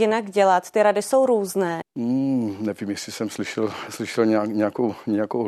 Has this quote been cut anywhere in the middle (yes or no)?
yes